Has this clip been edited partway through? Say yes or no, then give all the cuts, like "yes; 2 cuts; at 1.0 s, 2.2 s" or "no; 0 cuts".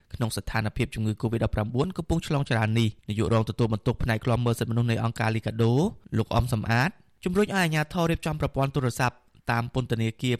yes; 1 cut; at 3.0 s